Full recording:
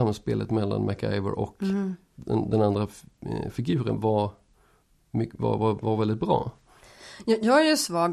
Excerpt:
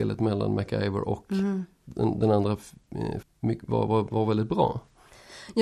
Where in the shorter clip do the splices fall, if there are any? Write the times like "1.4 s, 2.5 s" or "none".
3.2 s